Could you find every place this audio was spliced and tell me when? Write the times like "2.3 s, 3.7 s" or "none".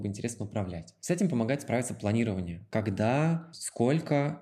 none

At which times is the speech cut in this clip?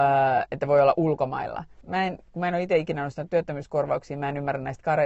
1.8 s

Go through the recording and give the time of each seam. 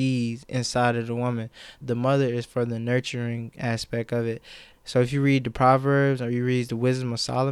1.8 s, 4.7 s

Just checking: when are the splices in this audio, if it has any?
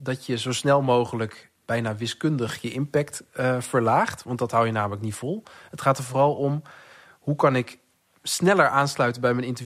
1.5 s

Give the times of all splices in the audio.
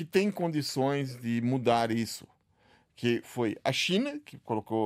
3.2 s

